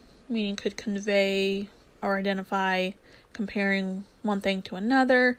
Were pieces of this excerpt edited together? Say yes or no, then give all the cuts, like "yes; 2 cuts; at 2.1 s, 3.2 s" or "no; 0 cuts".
yes; 1 cut; at 1.9 s